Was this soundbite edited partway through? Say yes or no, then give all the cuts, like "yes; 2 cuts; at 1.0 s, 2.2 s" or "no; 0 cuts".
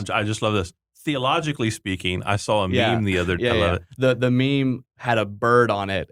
yes; 2 cuts; at 3.4 s, 4.9 s